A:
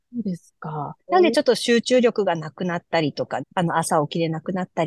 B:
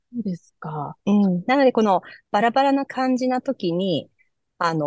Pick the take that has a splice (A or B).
A